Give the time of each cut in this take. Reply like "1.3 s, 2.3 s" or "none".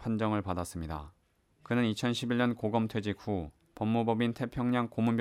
1.5 s